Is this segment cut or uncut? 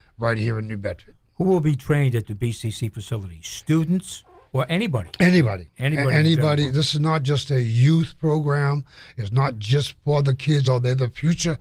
cut